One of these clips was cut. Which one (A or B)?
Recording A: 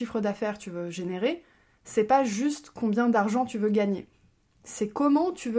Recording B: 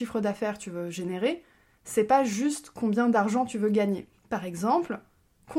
B